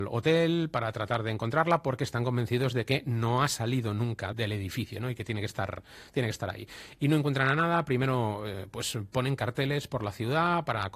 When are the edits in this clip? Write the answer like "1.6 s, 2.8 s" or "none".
4.3 s